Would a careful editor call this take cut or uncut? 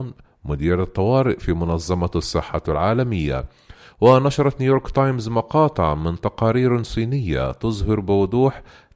cut